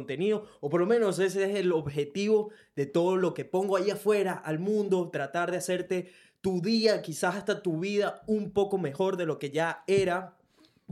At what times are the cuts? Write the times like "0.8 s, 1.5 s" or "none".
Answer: none